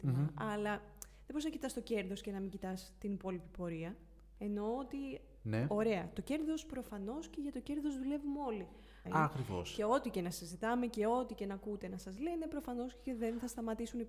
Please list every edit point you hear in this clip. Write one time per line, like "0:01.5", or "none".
0:09.1